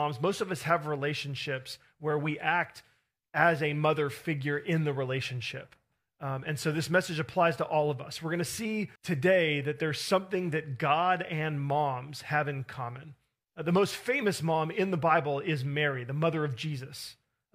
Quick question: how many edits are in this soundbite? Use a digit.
2